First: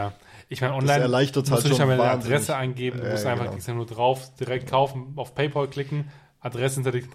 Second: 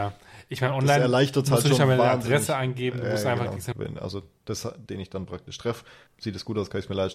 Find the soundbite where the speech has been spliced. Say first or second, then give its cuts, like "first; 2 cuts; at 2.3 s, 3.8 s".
second; 3 cuts; at 3.7 s, 4.9 s, 6.1 s